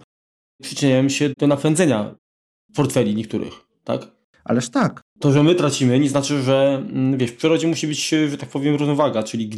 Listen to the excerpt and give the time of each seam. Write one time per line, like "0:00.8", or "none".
0:01.3
0:05.1